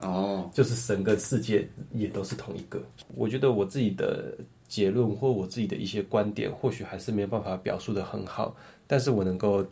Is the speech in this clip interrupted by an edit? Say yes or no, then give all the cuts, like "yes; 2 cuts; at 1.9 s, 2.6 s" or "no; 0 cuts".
no; 0 cuts